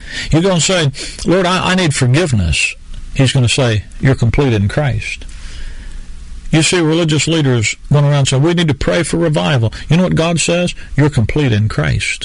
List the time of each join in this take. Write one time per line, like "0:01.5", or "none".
none